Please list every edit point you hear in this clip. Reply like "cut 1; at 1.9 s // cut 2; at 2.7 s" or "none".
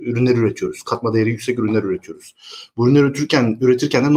none